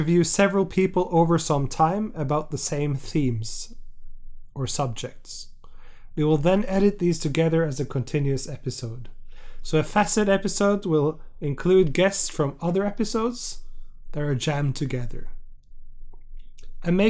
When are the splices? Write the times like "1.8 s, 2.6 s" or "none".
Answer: none